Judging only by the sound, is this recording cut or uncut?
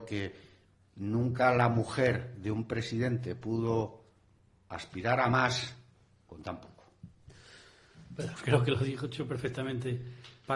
cut